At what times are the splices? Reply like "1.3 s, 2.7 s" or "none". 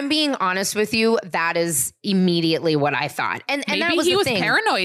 none